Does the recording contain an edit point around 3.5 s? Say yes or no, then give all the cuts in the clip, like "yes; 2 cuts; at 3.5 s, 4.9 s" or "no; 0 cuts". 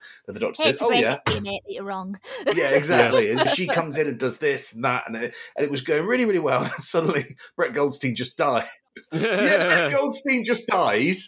yes; 1 cut; at 3.5 s